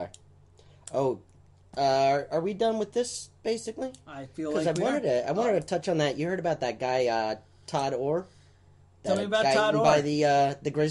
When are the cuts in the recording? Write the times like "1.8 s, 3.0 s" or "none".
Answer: none